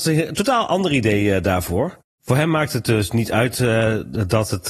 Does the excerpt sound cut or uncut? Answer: uncut